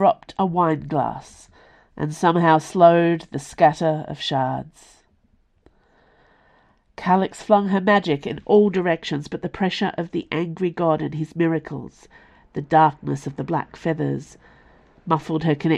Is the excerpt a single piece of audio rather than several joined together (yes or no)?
yes